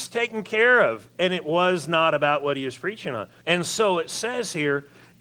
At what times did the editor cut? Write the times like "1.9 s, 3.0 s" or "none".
3.4 s